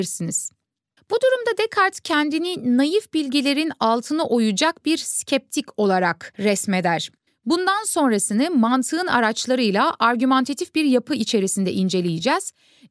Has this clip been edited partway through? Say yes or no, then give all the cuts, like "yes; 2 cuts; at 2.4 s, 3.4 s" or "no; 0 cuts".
yes; 2 cuts; at 1.0 s, 7.3 s